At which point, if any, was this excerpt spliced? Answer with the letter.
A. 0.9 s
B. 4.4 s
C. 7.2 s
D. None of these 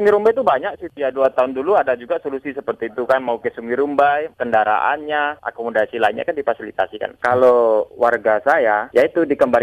B